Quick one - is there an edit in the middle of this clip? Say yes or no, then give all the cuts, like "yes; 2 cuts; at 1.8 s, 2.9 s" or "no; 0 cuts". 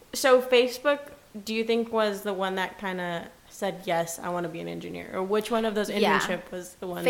no; 0 cuts